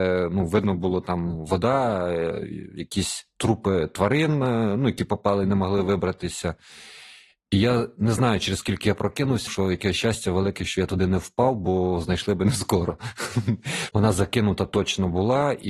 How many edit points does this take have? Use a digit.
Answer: 2